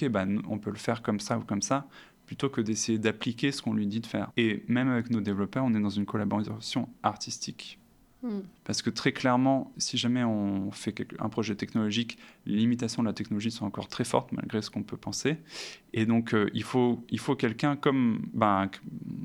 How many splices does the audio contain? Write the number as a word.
three